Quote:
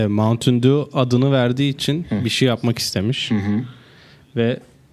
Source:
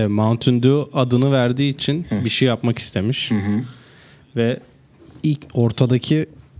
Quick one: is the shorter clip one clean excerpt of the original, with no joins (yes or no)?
yes